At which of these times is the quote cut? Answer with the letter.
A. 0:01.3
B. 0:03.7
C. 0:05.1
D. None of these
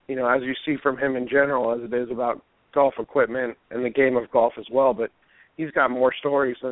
B